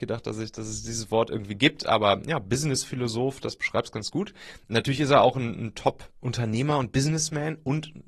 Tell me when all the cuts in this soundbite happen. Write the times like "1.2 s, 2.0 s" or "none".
none